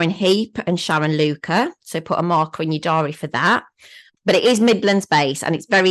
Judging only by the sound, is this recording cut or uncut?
cut